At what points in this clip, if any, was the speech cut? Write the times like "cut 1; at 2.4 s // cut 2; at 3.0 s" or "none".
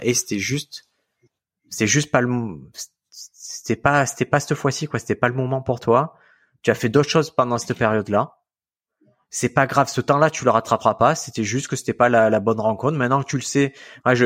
none